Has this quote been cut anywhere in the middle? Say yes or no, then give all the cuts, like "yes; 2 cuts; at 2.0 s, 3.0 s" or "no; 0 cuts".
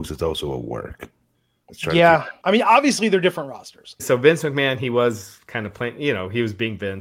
yes; 2 cuts; at 2.4 s, 4.0 s